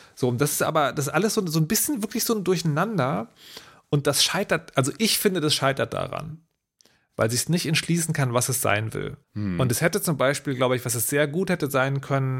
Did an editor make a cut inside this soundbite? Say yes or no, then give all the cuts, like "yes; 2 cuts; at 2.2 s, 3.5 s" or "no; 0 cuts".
yes; 1 cut; at 9.2 s